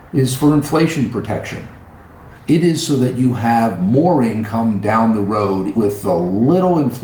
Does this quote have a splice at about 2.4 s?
yes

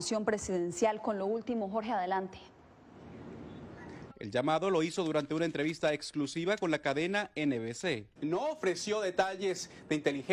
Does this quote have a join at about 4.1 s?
yes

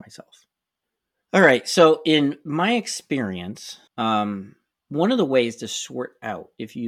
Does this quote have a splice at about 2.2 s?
no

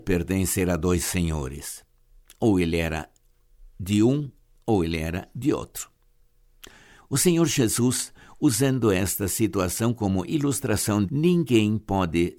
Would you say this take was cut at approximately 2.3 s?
no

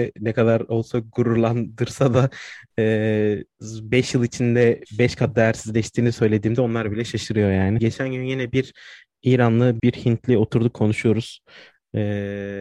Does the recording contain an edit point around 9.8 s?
yes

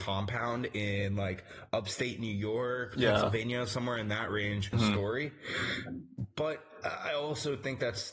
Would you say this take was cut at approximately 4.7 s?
yes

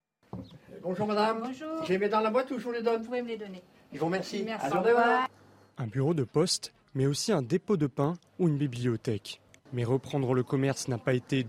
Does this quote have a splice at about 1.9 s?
no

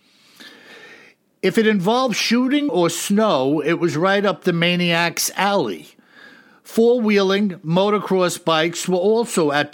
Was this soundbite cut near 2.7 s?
yes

